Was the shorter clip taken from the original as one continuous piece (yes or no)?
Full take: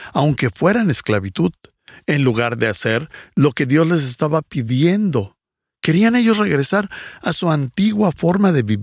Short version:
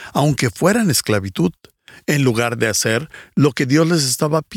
yes